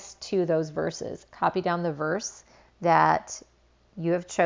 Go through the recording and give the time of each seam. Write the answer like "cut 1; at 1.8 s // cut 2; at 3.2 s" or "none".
cut 1; at 1.3 s